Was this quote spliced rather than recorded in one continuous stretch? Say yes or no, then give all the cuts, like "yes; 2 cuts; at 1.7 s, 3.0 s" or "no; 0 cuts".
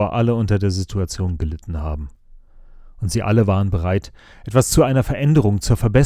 no; 0 cuts